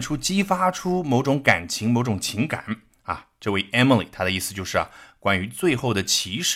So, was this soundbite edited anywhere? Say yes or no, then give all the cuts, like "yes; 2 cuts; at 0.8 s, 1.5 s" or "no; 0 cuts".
no; 0 cuts